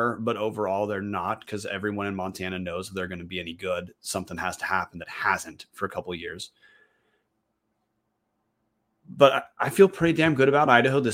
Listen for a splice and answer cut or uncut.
uncut